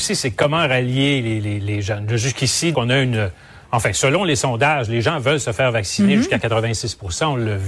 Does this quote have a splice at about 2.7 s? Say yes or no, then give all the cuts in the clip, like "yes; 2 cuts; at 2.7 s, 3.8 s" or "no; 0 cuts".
yes; 1 cut; at 2.7 s